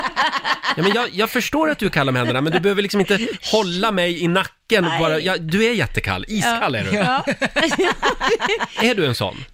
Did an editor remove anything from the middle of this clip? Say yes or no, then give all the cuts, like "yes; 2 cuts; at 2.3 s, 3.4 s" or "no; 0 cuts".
no; 0 cuts